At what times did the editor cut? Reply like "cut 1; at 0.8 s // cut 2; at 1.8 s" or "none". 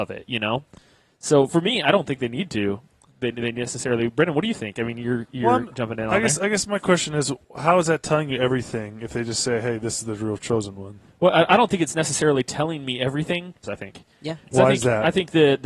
cut 1; at 7.4 s // cut 2; at 13.6 s